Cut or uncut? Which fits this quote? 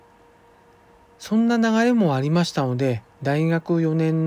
cut